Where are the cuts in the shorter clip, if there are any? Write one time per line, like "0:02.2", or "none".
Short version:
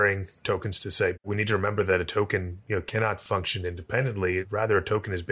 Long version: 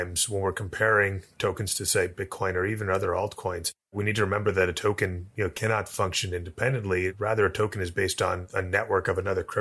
0:01.2